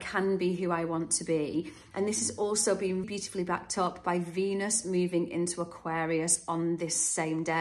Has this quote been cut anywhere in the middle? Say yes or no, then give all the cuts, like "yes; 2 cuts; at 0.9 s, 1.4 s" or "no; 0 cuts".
yes; 2 cuts; at 1.9 s, 3.0 s